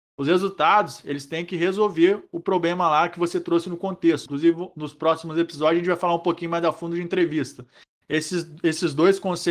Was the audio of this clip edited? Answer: yes; 2 cuts; at 4.3 s, 8.0 s

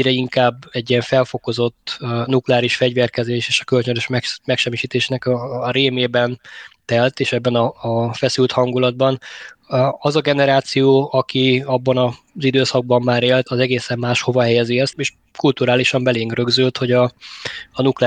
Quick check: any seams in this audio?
yes; 2 cuts; at 13.5 s, 14.9 s

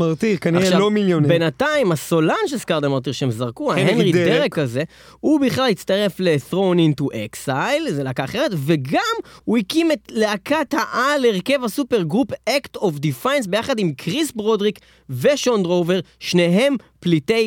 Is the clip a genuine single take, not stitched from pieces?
yes; 0 cuts

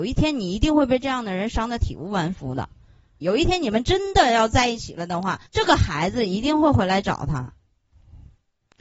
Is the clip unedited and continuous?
no; 2 cuts; at 3.2 s, 5.5 s

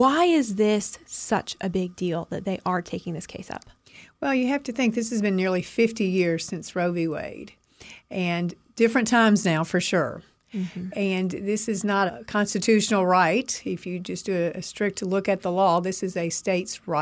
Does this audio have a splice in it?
yes; 1 cut; at 12.1 s

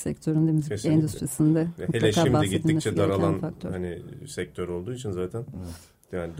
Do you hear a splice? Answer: no; 0 cuts

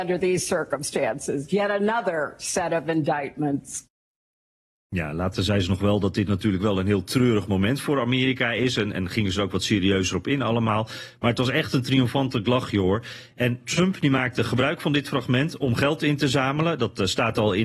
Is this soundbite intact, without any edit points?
yes; 0 cuts

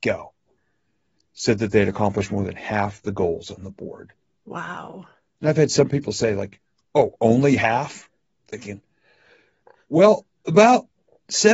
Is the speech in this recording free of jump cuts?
yes; 0 cuts

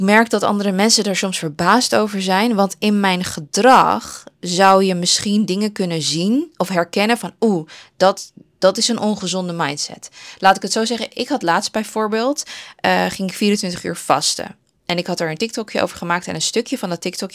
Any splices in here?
no; 0 cuts

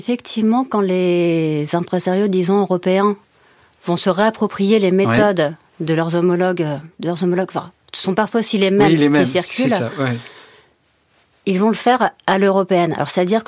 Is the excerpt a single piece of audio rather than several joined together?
yes; 0 cuts

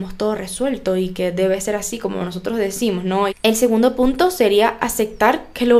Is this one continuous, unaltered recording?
no; 1 cut; at 3.3 s

